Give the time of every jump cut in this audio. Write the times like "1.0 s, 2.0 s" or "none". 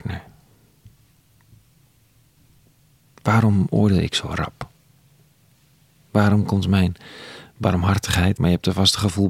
8.4 s